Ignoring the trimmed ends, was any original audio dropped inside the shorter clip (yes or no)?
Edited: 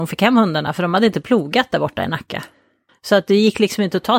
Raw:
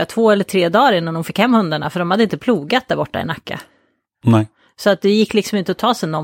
yes